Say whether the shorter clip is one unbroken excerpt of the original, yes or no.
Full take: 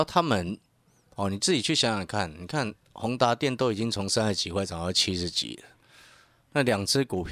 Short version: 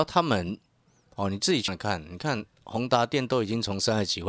no